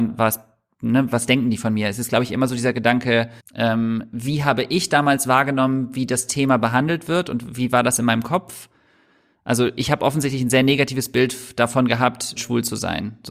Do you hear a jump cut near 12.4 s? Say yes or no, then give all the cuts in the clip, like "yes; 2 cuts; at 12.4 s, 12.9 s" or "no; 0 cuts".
yes; 2 cuts; at 3.4 s, 12.4 s